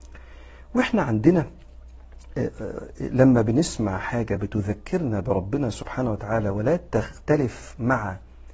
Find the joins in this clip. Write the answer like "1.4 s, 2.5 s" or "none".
none